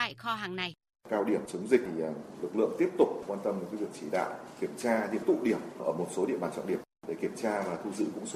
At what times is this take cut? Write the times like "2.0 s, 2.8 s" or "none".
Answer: 1.0 s